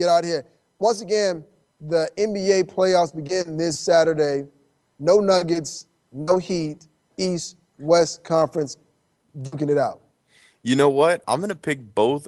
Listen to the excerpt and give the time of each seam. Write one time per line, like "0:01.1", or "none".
0:07.1
0:11.2